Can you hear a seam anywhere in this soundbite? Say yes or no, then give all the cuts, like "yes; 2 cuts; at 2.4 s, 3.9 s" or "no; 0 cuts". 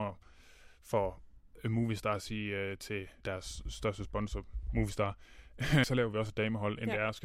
yes; 2 cuts; at 3.2 s, 5.8 s